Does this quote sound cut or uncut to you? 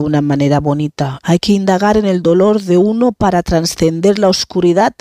cut